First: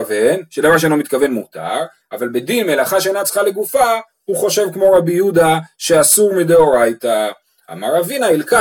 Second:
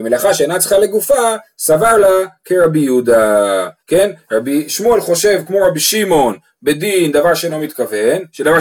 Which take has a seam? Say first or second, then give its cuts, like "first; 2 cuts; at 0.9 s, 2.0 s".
second; 1 cut; at 3.8 s